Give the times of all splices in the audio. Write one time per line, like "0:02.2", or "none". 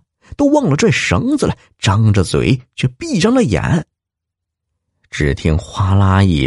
none